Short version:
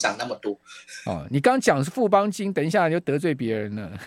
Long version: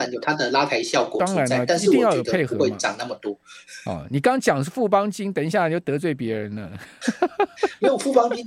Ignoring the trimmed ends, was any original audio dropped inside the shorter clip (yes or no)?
no